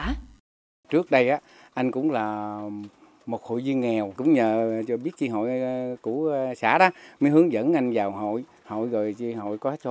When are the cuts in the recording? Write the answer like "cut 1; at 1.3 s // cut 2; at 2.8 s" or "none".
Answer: none

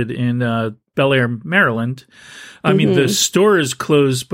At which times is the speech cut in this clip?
none

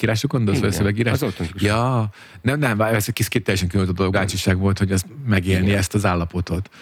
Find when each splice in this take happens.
cut 1; at 4.1 s

